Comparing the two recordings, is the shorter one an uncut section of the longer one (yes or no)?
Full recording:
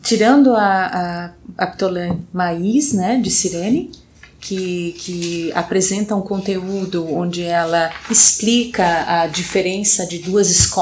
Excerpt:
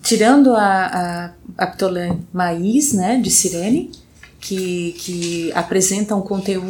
yes